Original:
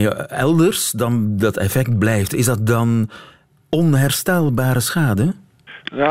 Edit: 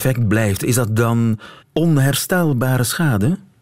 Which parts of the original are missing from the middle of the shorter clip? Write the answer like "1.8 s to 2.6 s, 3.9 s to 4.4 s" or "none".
3.3 s to 3.6 s